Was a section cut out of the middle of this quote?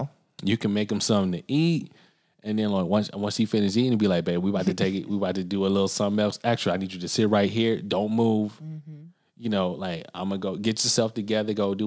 no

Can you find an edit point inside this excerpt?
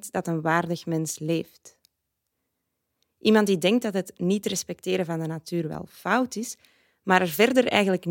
no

